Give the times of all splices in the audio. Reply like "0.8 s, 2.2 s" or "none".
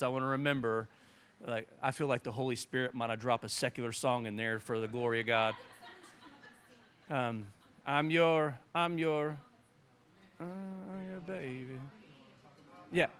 none

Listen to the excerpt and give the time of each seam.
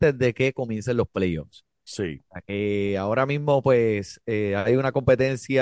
none

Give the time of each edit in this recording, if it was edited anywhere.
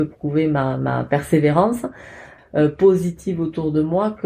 2.4 s

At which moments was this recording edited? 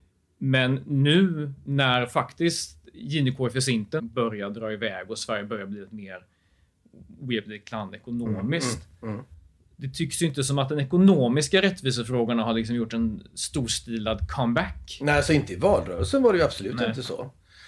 4.0 s

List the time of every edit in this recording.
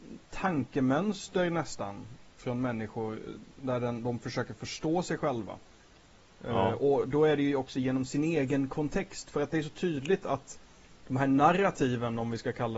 2.4 s

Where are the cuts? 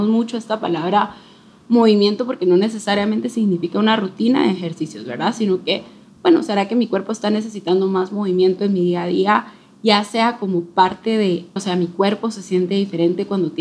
11.6 s

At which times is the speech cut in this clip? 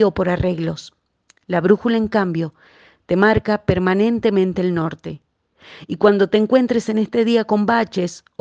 none

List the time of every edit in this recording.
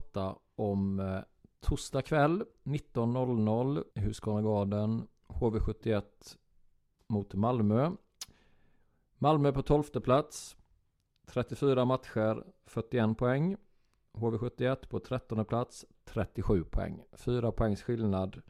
3.9 s, 15.9 s

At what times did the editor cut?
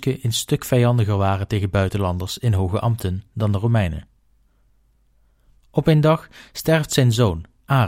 none

